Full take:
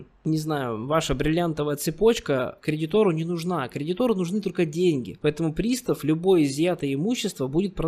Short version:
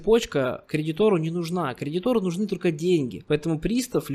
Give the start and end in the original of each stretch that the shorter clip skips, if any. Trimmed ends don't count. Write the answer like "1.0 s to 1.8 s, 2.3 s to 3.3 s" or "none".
none